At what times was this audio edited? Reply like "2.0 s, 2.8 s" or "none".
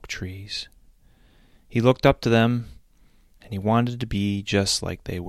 none